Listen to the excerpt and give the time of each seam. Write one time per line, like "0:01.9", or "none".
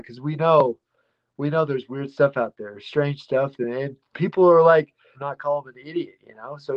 0:05.1